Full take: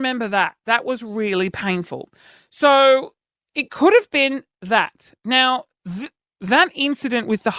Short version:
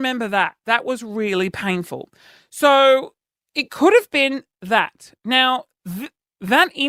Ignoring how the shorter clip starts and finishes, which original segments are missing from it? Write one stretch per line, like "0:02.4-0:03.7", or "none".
none